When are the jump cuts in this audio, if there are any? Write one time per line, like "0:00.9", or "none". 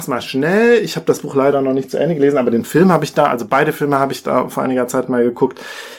none